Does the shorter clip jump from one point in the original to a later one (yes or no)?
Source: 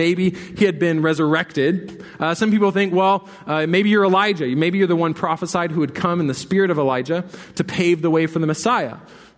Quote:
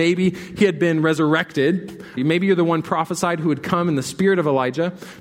yes